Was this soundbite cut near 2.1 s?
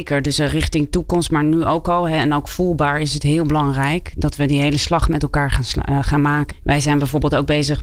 no; 1 cut; at 6.5 s

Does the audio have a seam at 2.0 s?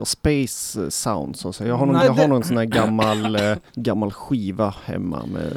yes; 2 cuts; at 2.0 s, 3.7 s

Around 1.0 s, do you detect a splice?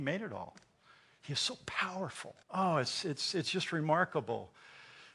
no; 1 cut; at 2.4 s

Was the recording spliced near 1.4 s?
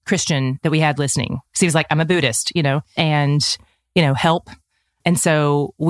no; 1 cut; at 3.0 s

